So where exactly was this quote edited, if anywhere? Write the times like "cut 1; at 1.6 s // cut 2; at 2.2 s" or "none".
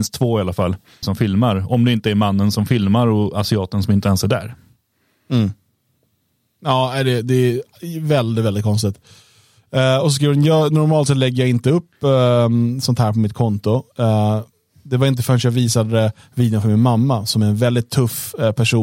cut 1; at 1.0 s